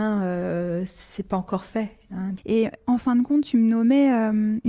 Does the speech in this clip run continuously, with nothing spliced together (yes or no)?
no